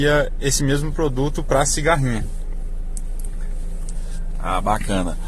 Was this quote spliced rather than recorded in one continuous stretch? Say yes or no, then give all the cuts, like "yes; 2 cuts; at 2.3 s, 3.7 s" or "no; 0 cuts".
no; 0 cuts